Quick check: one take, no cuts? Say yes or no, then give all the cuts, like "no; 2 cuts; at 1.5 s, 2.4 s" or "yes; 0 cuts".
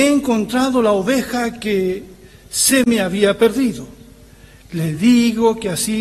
yes; 0 cuts